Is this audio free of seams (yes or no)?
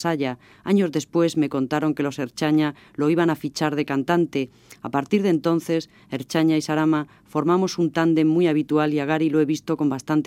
yes